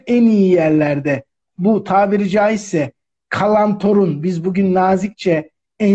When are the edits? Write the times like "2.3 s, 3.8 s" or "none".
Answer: none